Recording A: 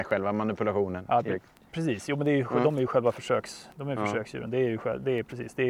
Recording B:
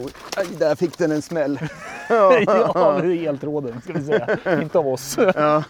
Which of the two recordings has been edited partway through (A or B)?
A